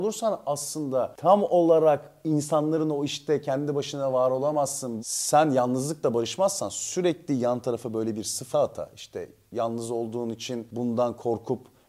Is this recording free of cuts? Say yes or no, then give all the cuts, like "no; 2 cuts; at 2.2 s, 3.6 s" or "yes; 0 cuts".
no; 2 cuts; at 5.0 s, 8.5 s